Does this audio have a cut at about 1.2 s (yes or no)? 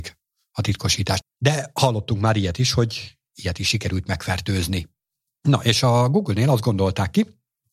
yes